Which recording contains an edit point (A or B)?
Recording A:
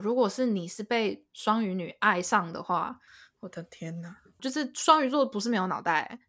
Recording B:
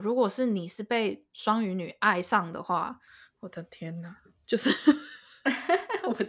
A